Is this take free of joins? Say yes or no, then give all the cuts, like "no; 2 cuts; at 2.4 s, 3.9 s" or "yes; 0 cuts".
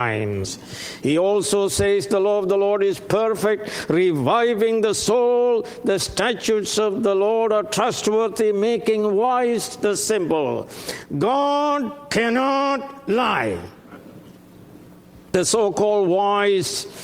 yes; 0 cuts